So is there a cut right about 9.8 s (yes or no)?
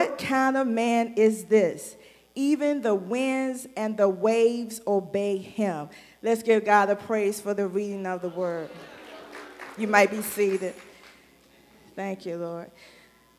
yes